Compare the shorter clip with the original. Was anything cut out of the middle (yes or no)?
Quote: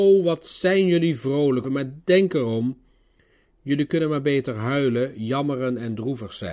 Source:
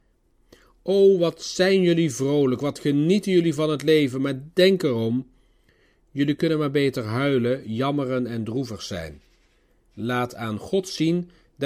yes